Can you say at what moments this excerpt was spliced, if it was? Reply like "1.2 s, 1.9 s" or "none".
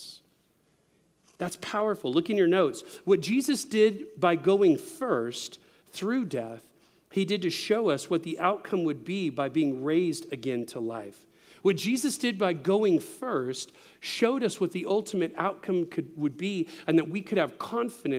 none